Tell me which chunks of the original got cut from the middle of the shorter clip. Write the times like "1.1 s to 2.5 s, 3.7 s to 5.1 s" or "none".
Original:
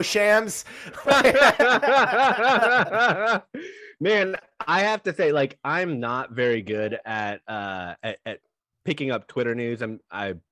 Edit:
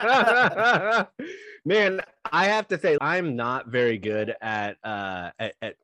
5.3 s to 5.6 s